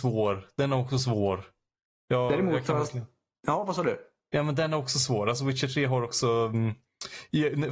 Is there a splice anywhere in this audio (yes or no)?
no